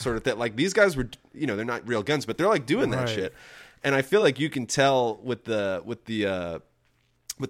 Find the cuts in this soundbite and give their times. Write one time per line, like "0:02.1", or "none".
none